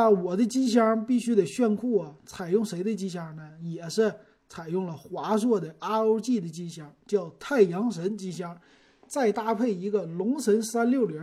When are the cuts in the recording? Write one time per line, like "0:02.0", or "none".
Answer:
none

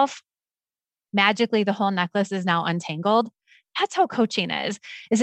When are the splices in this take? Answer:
none

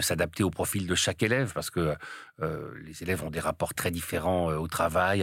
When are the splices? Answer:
0:03.7

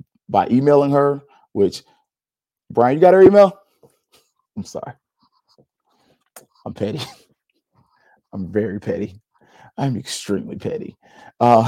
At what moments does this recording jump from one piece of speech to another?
none

